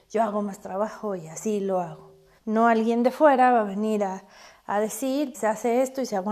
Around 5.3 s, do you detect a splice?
yes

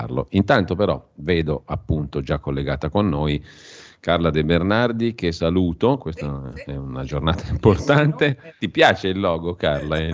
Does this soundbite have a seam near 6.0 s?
yes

